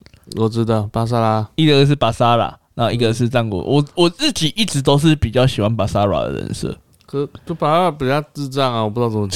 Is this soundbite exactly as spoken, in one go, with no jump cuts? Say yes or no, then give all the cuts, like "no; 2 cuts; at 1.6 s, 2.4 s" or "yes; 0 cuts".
yes; 0 cuts